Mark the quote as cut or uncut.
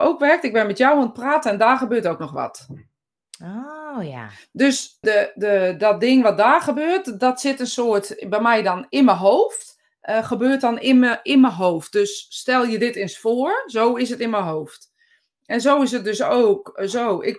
cut